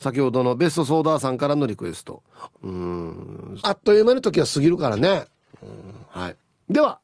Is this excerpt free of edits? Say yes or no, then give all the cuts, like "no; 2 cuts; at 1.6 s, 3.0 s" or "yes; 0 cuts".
no; 2 cuts; at 2.5 s, 3.6 s